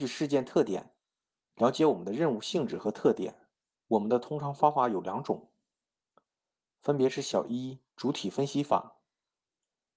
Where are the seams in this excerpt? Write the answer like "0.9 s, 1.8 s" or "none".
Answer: 3.7 s, 7.9 s